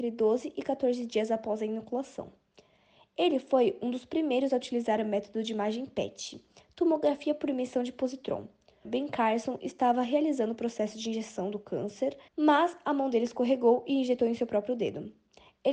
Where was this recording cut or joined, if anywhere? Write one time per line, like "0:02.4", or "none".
0:08.8
0:12.3

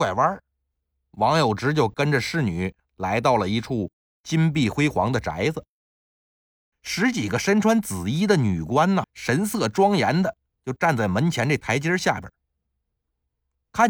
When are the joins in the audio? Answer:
0:06.7
0:09.0

